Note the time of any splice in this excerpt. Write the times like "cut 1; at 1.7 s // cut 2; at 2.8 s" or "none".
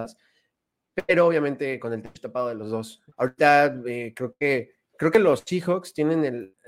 cut 1; at 3.1 s